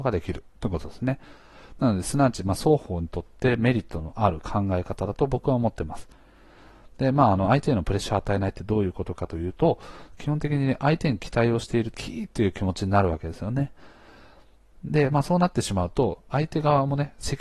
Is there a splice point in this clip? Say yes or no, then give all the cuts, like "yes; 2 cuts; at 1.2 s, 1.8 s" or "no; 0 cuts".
yes; 1 cut; at 11.9 s